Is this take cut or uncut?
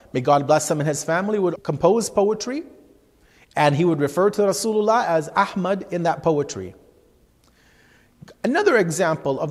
cut